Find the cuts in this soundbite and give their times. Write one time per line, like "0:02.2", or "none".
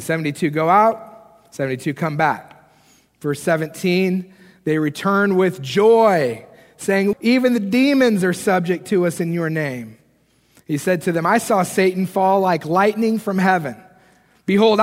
0:07.1